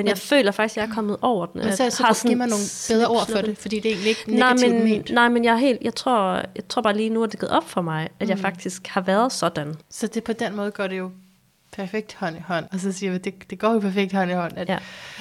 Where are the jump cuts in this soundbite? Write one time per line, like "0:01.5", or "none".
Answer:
0:09.8
0:12.7